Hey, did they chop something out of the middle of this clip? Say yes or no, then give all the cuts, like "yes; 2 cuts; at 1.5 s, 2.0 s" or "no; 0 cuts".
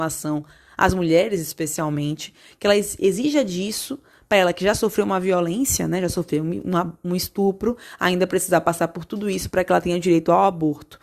no; 0 cuts